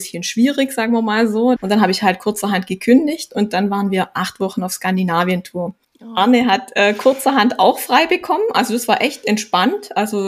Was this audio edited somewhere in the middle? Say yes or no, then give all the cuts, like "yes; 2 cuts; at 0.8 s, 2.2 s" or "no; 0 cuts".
yes; 1 cut; at 1.6 s